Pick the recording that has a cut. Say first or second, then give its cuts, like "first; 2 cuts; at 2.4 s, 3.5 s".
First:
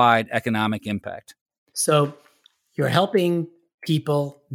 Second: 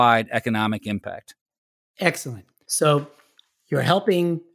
first; 1 cut; at 1.7 s